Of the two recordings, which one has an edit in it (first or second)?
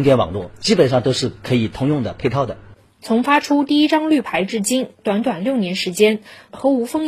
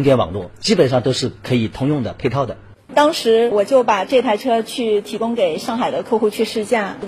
second